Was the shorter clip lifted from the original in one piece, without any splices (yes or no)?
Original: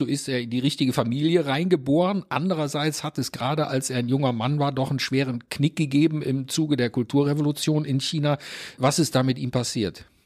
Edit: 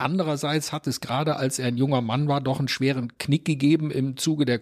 yes